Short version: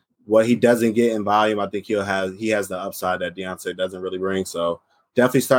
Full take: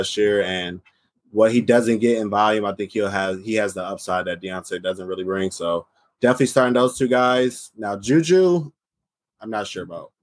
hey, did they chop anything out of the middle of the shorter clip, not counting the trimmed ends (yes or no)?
no